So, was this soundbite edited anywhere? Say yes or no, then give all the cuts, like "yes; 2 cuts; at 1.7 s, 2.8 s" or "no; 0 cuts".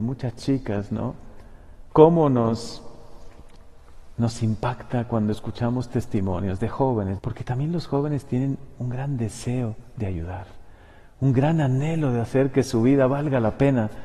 yes; 2 cuts; at 1.9 s, 7.2 s